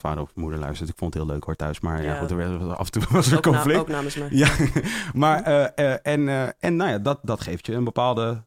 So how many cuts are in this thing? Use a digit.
0